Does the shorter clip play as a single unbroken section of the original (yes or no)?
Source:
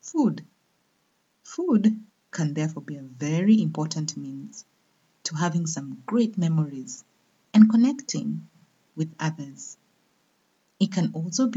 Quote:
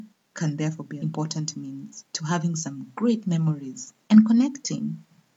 no